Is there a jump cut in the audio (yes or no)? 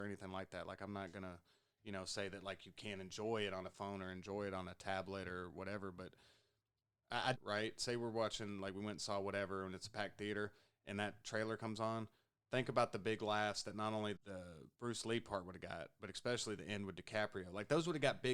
yes